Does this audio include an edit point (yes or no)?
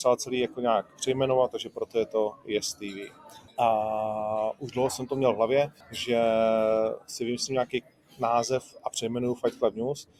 yes